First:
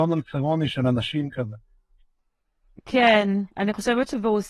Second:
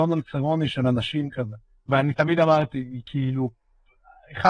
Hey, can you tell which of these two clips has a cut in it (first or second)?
second